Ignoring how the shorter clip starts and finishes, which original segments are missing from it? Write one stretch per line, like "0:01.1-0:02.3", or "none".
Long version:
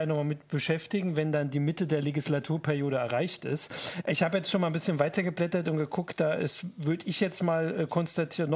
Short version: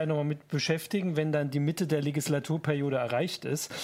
none